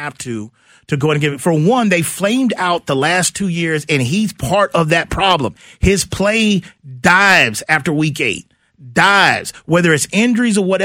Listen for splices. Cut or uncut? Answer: uncut